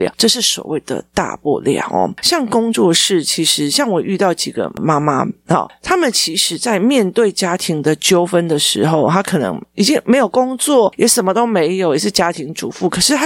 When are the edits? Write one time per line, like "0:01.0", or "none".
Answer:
none

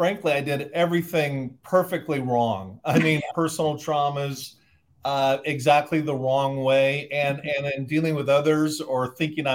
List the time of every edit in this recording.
0:03.3

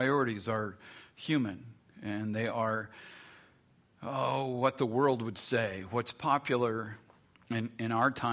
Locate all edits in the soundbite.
none

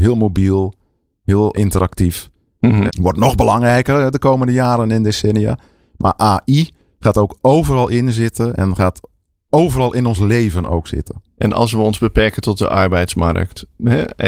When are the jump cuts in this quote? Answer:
0:01.5
0:02.9

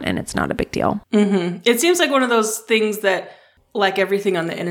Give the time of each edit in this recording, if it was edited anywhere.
0:01.0

